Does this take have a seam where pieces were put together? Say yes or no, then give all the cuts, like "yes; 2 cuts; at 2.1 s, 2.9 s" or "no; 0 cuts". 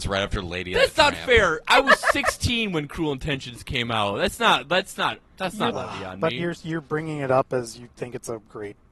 yes; 1 cut; at 5.7 s